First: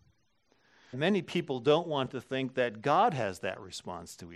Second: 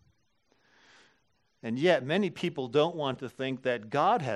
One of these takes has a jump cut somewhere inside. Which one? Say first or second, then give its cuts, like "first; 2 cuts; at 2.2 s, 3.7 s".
first; 1 cut; at 0.9 s